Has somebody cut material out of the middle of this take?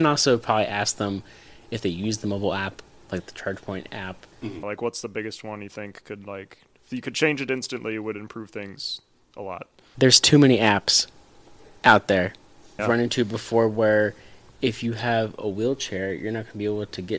yes; 2 cuts; at 4.6 s, 12.8 s

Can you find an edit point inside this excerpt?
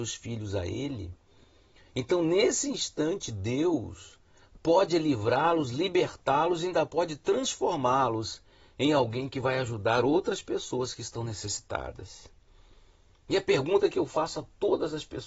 no; 0 cuts

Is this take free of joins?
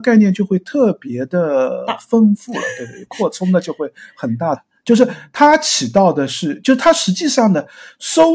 no; 1 cut; at 4.6 s

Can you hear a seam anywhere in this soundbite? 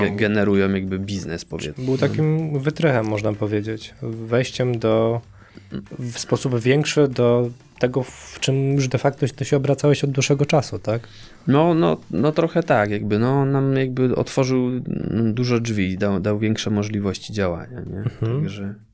yes; 1 cut; at 1.7 s

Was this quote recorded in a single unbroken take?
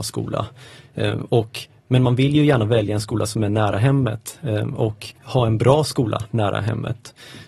no; 1 cut; at 5.2 s

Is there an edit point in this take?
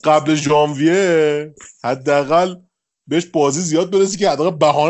no; 0 cuts

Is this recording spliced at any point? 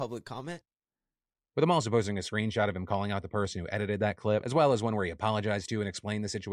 no; 0 cuts

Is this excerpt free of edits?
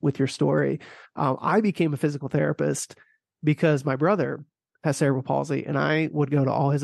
yes; 0 cuts

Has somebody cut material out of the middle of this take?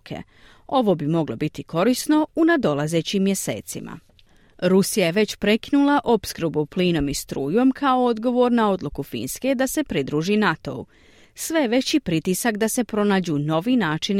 no; 0 cuts

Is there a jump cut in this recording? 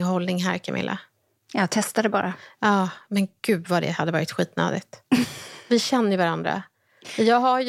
no; 0 cuts

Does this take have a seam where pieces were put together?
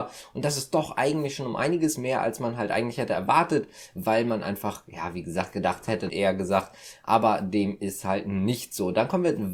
yes; 1 cut; at 6.1 s

